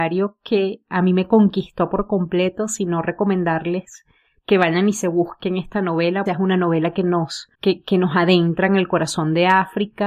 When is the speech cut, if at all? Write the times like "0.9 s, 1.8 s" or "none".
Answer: 6.3 s, 7.5 s